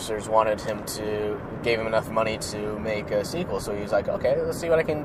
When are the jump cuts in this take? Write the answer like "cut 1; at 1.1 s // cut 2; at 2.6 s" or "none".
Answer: none